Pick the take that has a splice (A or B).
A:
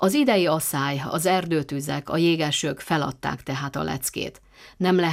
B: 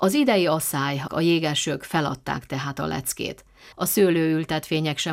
B